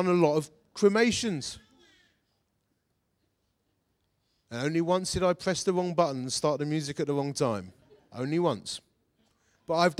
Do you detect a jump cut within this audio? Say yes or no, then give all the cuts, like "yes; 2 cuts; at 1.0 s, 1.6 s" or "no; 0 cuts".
no; 0 cuts